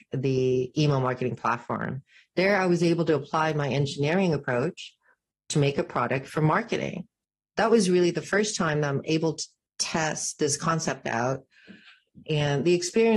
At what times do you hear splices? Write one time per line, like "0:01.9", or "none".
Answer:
none